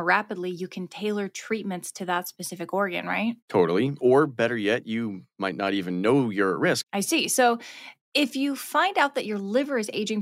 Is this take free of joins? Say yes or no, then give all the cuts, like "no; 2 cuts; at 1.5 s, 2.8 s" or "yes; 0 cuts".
no; 2 cuts; at 3.4 s, 6.8 s